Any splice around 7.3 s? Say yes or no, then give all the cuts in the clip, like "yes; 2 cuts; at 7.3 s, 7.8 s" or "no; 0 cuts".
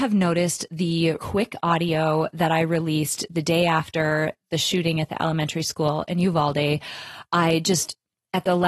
no; 1 cut; at 1.2 s